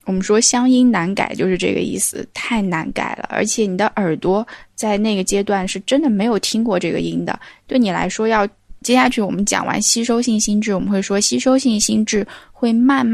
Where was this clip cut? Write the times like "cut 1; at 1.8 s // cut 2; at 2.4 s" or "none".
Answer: cut 1; at 8.8 s

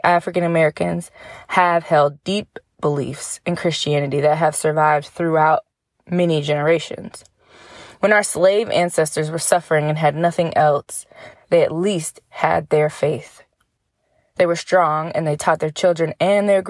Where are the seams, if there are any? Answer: cut 1; at 11.3 s

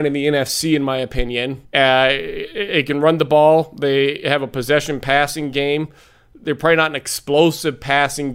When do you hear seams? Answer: cut 1; at 1.6 s

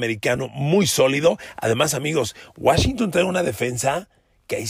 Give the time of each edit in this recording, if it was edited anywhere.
none

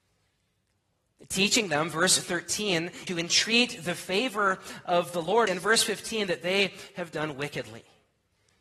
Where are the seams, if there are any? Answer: cut 1; at 3.1 s // cut 2; at 5.5 s

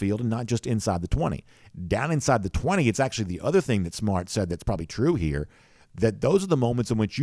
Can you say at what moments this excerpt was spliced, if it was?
none

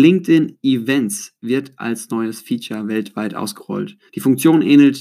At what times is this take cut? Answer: none

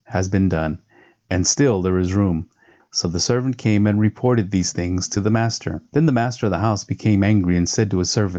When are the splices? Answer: cut 1; at 2.8 s // cut 2; at 5.9 s

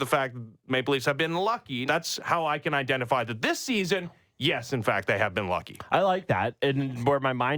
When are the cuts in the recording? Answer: cut 1; at 1.9 s

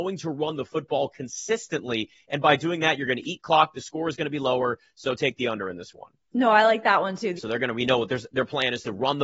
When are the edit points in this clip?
cut 1; at 7.4 s

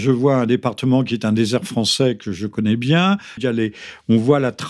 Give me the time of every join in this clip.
cut 1; at 3.4 s

